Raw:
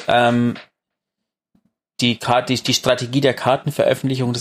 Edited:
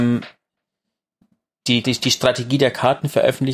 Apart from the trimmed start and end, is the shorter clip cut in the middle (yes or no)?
yes